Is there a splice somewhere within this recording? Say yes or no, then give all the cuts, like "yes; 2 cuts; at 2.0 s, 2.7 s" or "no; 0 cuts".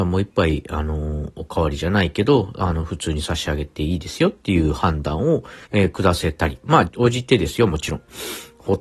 yes; 2 cuts; at 5.6 s, 6.9 s